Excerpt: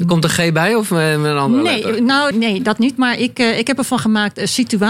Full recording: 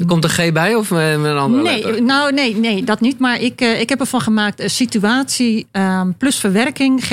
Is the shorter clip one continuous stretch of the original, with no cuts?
no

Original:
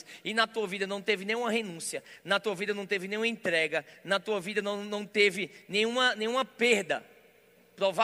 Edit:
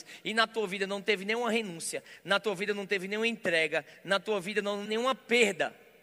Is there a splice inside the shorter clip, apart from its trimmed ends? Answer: yes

